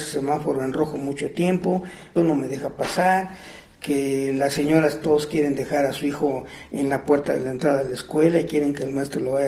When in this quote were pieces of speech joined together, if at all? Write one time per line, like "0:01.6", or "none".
0:02.2